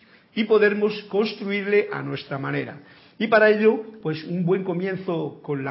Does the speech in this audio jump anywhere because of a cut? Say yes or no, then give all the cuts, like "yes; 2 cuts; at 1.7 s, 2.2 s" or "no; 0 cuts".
no; 0 cuts